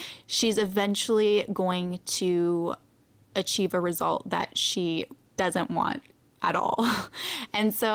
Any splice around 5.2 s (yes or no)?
yes